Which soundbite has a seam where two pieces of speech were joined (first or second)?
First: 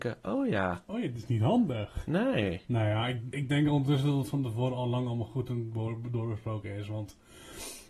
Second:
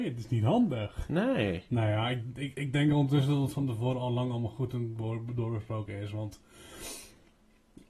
first